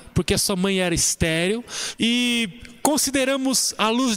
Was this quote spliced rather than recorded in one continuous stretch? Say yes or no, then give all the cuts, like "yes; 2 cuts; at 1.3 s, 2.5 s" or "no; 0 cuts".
yes; 1 cut; at 1.9 s